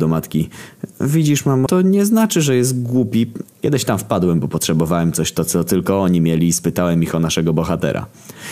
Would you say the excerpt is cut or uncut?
cut